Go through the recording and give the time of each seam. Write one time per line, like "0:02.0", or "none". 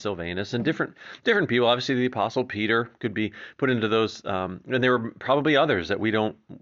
none